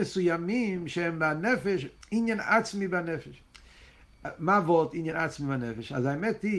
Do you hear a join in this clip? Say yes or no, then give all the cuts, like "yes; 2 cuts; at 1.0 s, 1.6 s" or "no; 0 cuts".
no; 0 cuts